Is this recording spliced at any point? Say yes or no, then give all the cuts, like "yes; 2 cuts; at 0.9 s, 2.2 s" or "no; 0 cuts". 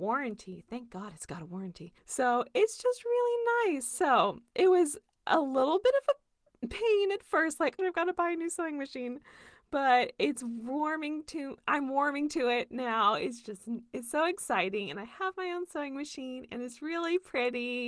yes; 2 cuts; at 2.0 s, 7.8 s